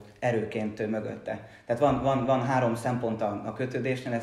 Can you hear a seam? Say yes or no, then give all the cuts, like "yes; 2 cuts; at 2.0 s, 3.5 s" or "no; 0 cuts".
no; 0 cuts